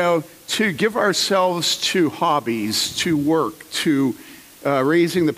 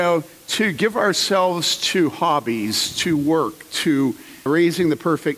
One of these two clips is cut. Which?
second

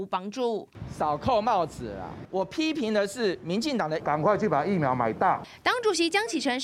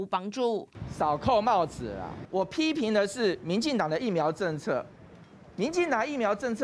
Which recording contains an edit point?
first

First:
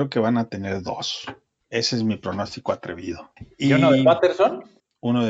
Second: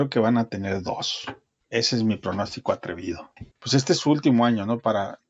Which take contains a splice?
second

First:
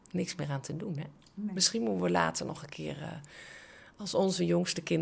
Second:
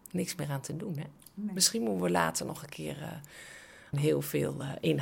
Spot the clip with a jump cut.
second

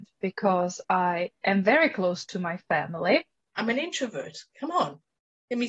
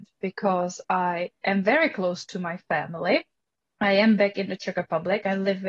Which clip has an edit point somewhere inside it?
first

